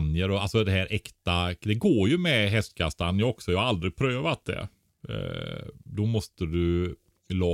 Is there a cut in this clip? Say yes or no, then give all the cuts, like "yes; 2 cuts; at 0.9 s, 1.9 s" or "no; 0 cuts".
no; 0 cuts